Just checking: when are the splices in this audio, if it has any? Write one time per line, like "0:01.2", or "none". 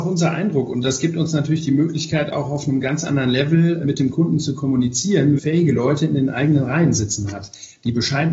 0:03.8
0:05.4